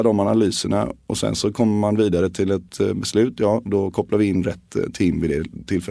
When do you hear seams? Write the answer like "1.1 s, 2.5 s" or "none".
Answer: none